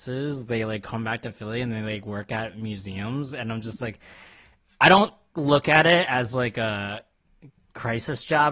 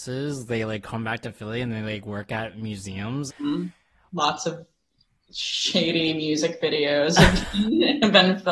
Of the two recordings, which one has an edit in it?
second; 1 cut; at 3.3 s

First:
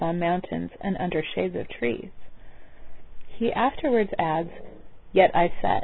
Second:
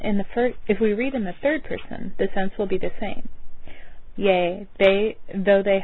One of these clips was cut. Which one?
second; 1 cut; at 4.1 s

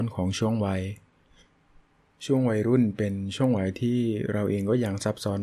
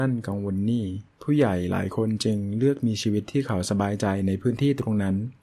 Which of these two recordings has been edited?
second; 1 cut; at 1.1 s

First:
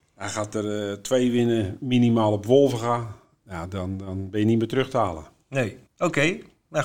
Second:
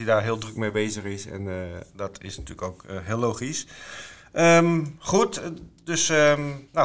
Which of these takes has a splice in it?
first; 1 cut; at 5.9 s

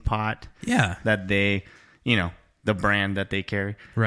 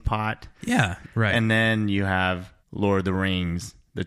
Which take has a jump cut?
second; 2 cuts; at 1.0 s, 2.6 s

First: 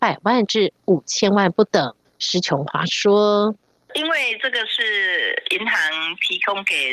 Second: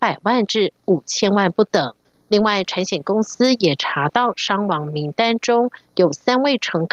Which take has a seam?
second; 1 cut; at 2.1 s

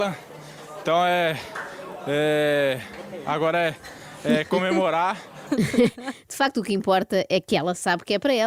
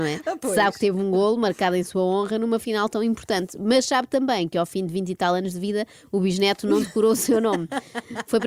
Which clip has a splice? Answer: first; 1 cut; at 5.5 s

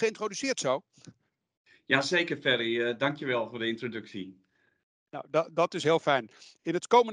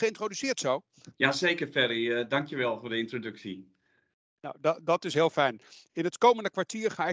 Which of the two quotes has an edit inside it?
second; 1 cut; at 1.1 s

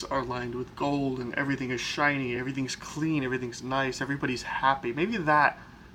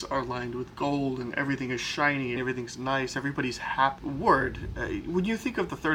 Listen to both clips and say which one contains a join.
second; 2 cuts; at 2.4 s, 4.0 s

